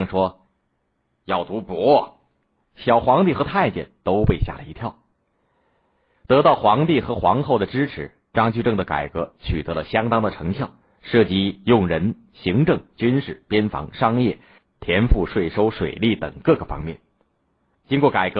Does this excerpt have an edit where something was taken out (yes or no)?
no